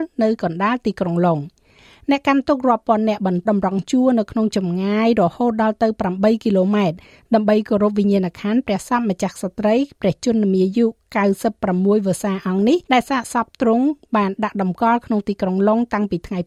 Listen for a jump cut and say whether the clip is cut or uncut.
cut